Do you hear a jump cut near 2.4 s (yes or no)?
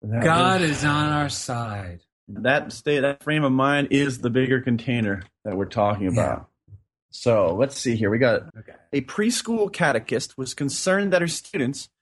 yes